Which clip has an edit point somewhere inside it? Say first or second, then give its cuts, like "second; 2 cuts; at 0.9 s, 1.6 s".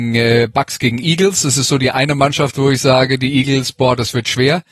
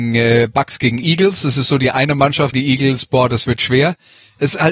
second; 1 cut; at 2.5 s